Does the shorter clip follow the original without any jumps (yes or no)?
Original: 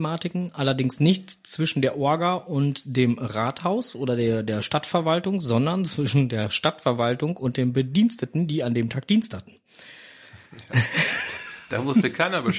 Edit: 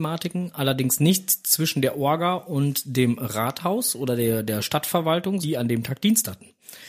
no